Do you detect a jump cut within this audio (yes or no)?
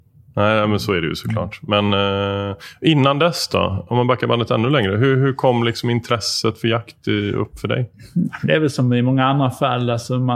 no